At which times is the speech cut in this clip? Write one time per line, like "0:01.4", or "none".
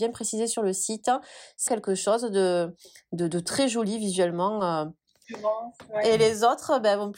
0:01.7
0:05.2